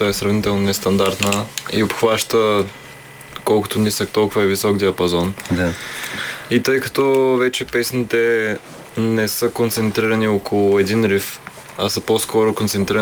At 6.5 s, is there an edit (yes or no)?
no